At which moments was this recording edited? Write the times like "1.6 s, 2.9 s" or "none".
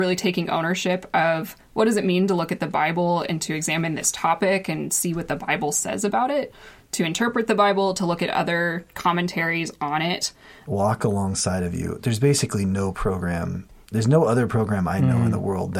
10.6 s, 12.0 s, 13.8 s